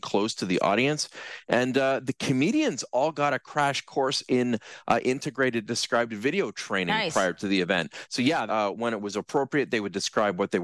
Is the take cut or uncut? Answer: cut